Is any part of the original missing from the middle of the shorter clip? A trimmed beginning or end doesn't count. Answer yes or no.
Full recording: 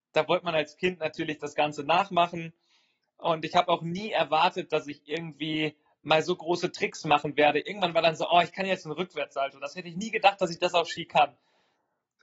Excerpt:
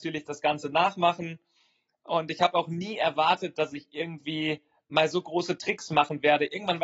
no